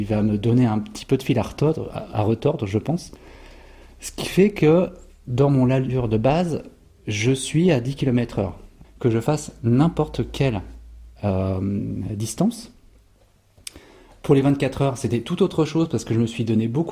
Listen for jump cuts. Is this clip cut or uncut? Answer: cut